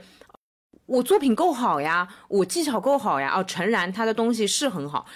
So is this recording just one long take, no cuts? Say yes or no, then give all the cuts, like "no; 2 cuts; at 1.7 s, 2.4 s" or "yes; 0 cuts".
yes; 0 cuts